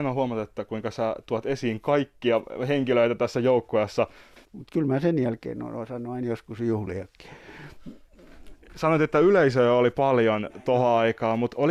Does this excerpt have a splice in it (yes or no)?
yes